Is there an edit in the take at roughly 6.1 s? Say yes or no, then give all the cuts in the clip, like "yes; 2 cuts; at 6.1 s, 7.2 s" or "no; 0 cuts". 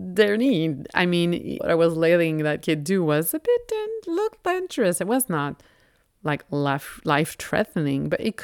no; 1 cut; at 1.6 s